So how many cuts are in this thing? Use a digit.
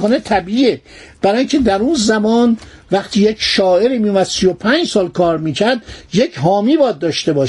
0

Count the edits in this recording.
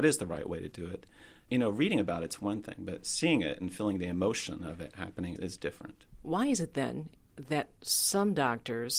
1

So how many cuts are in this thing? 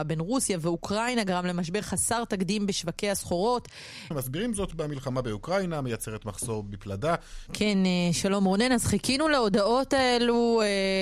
2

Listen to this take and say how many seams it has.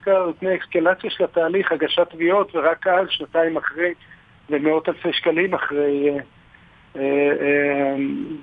1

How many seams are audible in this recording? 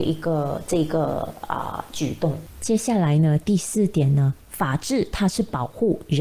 0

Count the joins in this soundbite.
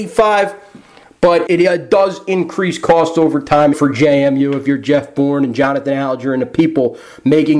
2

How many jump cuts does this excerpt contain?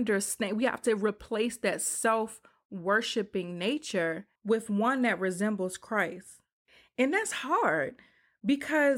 1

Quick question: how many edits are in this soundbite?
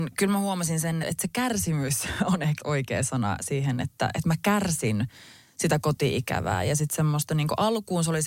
2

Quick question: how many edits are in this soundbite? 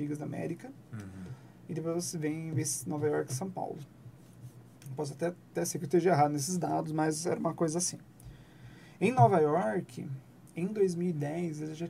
0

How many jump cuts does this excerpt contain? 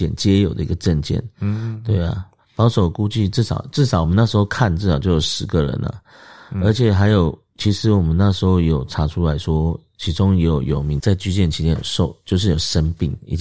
1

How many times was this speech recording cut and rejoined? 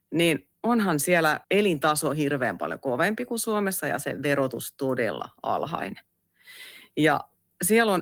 1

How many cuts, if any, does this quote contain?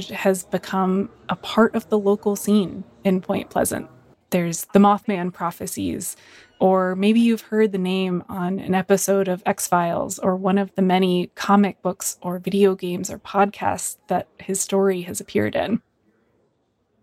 1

